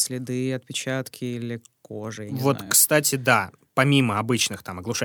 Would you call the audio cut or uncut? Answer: uncut